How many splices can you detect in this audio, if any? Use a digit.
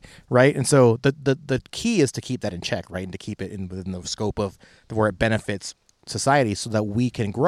0